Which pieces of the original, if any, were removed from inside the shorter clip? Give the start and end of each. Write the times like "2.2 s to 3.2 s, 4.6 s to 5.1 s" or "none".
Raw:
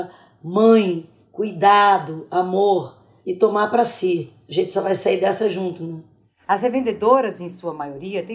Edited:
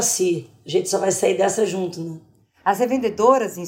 none